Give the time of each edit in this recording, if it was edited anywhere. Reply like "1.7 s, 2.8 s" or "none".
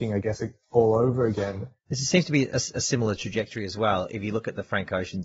none